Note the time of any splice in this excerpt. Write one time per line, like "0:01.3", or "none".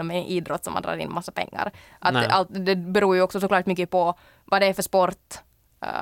none

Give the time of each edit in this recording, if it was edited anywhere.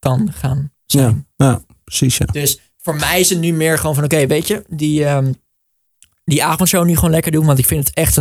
none

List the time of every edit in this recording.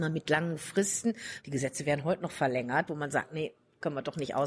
0:01.4
0:02.9

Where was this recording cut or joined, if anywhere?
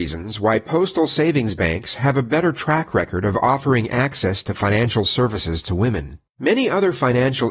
0:06.3

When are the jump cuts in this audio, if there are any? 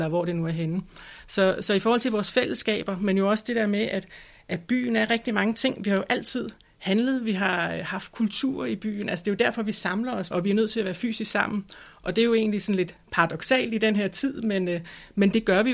0:10.3

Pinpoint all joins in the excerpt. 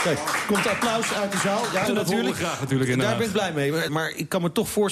0:01.9
0:03.9

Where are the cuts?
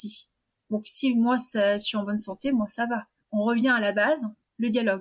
0:03.2

